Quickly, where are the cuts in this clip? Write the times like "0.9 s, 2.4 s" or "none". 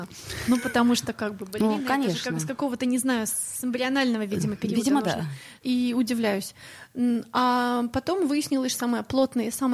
5.6 s, 8.7 s